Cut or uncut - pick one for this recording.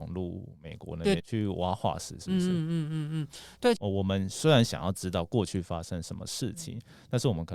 cut